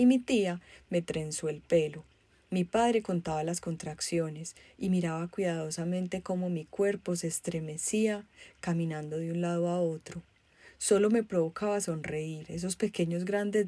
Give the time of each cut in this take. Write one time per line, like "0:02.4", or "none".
none

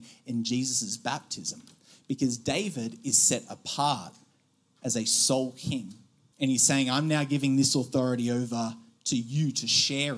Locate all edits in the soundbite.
0:06.3

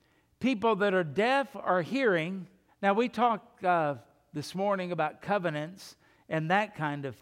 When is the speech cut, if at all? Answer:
0:02.7

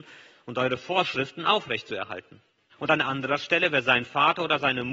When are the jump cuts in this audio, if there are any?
0:02.7

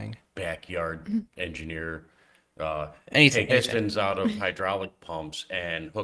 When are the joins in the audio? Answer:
0:03.5

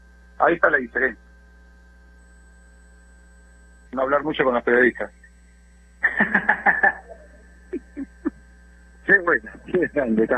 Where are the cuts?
0:03.9

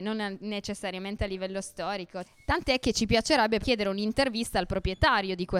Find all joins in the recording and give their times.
0:02.2
0:03.6

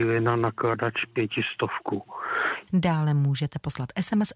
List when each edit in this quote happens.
0:02.7

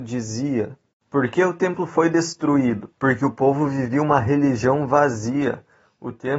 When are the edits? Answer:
0:00.9
0:02.9

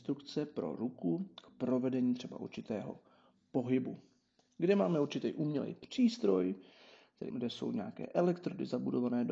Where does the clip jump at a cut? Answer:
0:07.3

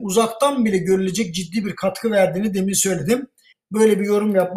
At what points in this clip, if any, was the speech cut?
0:03.5

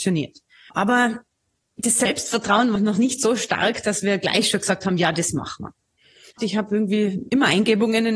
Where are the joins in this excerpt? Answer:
0:02.8
0:06.4

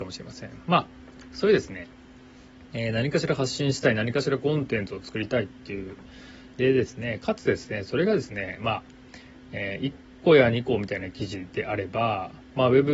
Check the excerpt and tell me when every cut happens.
0:06.5

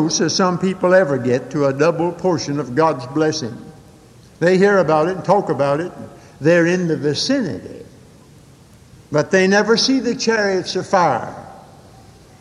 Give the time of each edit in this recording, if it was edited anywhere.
none

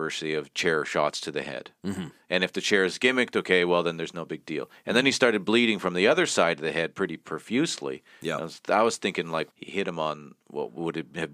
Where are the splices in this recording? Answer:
0:09.5

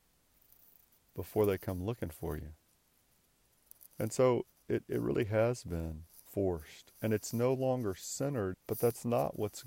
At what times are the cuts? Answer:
0:03.9
0:06.2
0:08.5

